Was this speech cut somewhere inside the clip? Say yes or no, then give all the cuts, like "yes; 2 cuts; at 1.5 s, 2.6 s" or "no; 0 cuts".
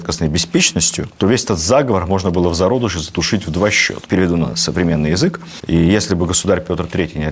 yes; 2 cuts; at 4.1 s, 5.6 s